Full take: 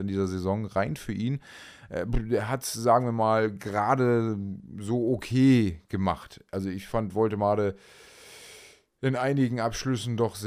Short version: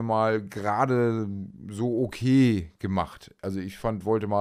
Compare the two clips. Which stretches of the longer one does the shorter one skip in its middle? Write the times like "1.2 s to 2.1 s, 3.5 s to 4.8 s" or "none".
none